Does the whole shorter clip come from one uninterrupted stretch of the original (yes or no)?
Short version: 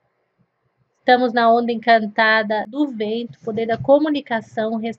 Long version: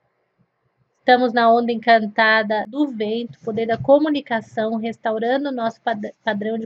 yes